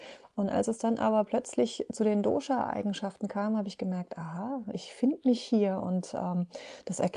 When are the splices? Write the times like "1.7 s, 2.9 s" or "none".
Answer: 4.7 s

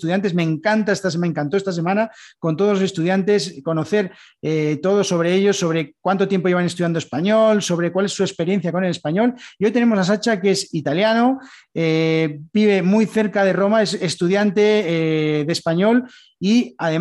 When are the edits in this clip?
none

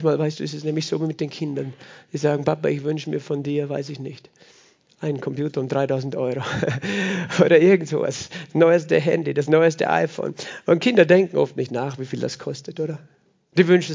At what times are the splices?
none

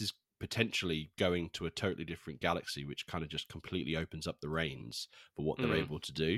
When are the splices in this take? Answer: none

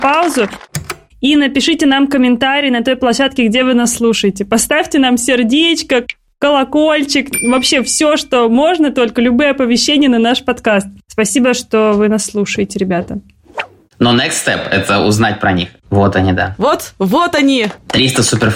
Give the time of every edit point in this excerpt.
15.8 s

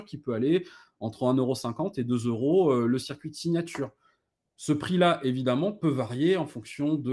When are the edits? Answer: none

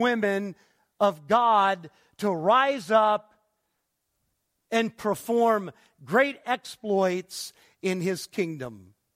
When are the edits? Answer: none

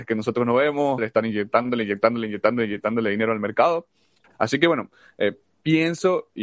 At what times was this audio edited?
1.0 s, 4.2 s

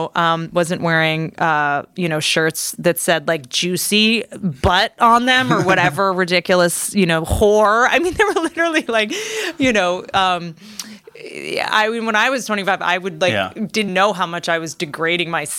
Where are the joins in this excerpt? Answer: 13.9 s

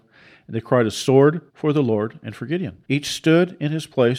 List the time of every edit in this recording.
1.5 s, 2.8 s

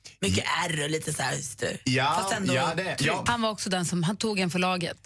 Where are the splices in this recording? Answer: 3.3 s

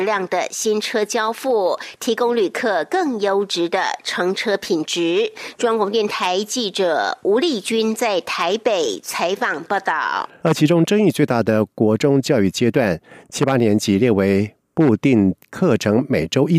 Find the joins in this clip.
10.4 s

